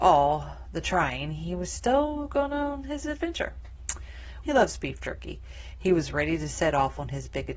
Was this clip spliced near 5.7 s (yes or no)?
no